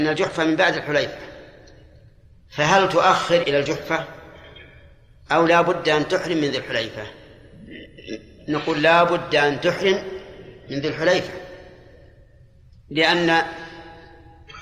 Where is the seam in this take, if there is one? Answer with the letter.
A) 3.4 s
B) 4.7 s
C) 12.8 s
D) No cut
A